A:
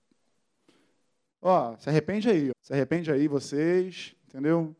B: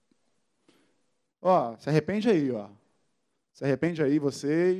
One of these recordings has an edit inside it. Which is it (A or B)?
A